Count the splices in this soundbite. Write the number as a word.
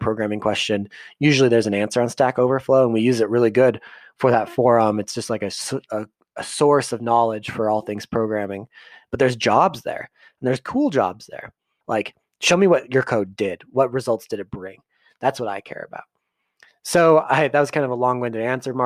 one